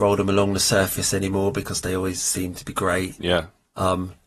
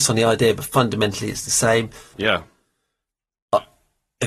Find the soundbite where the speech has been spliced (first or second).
second